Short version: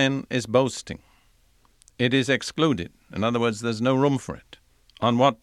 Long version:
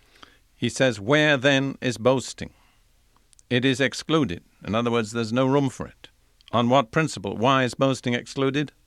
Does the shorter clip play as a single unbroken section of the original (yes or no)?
yes